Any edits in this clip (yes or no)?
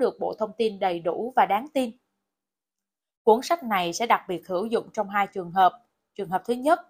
no